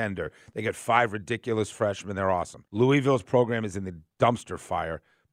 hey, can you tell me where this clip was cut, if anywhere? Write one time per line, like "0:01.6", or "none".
0:02.7